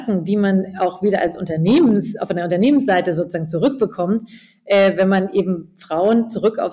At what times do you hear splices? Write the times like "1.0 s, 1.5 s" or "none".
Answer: none